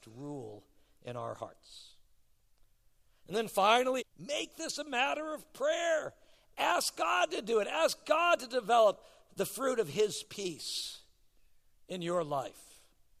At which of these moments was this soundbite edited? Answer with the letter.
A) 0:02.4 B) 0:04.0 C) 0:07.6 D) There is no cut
B